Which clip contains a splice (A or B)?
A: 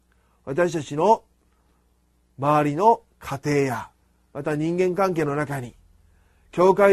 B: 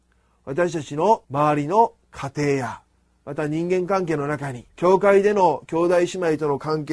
B